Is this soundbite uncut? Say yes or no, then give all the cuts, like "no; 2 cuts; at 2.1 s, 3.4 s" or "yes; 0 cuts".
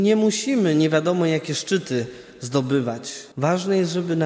no; 1 cut; at 3.3 s